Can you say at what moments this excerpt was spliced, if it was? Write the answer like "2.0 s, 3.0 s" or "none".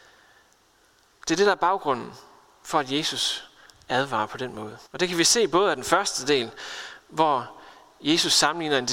4.9 s